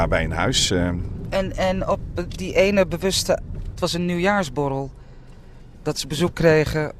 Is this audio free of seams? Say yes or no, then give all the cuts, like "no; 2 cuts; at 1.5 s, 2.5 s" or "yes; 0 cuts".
no; 2 cuts; at 1.3 s, 3.7 s